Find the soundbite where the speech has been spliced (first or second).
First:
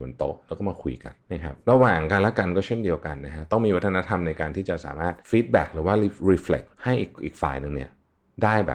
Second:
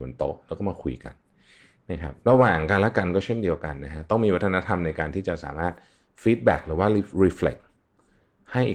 first